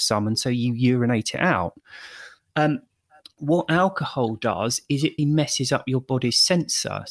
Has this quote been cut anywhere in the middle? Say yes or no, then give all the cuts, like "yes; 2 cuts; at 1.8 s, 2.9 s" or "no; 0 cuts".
yes; 1 cut; at 5.2 s